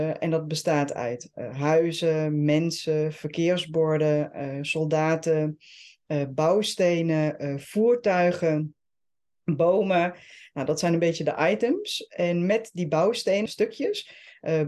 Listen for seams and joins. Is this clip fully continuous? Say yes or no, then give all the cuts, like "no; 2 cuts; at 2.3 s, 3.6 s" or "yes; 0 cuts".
no; 1 cut; at 13.5 s